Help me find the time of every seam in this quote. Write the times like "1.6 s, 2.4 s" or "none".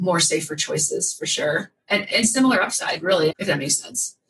2.1 s, 3.3 s